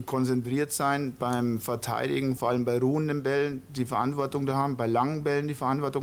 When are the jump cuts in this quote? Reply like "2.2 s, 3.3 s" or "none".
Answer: 2.4 s